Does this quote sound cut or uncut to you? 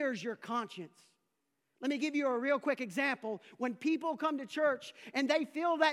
uncut